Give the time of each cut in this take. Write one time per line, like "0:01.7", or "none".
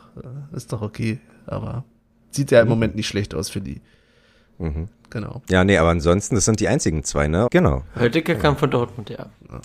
0:04.9
0:07.5